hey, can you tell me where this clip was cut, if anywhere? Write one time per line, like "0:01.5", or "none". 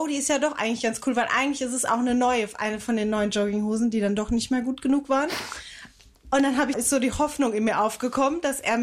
0:06.7